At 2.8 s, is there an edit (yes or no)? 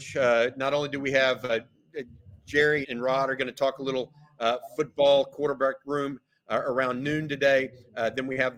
yes